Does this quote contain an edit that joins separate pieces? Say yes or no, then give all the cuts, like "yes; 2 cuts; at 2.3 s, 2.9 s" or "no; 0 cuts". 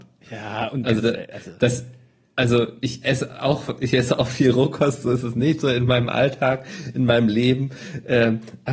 no; 0 cuts